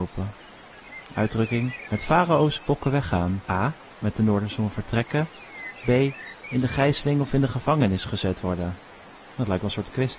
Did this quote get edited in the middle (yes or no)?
yes